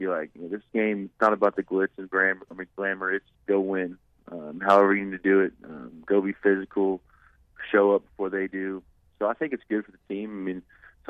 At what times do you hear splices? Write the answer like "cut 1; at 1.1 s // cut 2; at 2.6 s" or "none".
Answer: cut 1; at 3.3 s